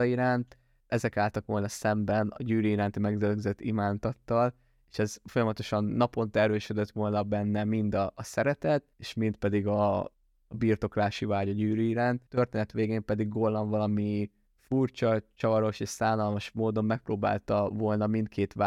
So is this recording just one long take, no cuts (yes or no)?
no